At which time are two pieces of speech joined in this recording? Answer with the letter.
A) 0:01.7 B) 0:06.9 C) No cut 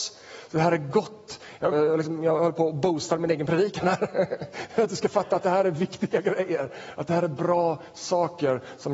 A